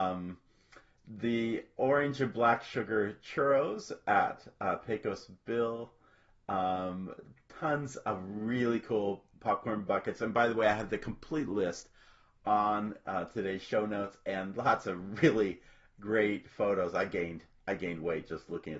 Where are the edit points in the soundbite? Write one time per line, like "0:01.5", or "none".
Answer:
none